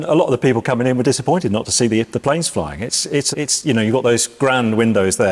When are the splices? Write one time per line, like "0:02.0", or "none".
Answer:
0:03.3